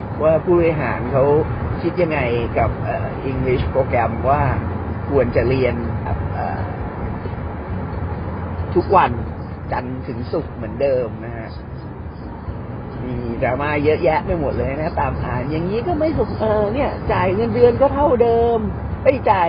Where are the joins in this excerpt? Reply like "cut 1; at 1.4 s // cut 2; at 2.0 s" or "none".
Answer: cut 1; at 6.1 s